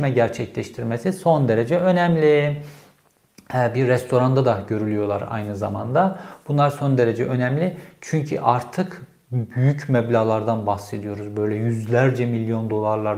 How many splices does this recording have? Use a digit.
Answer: 0